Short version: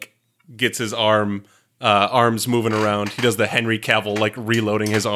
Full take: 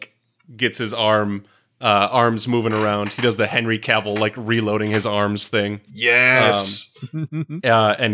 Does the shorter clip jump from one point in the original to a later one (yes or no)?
no